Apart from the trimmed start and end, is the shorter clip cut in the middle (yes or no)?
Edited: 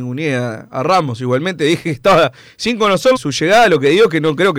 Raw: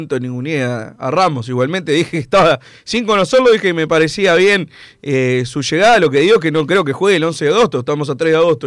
yes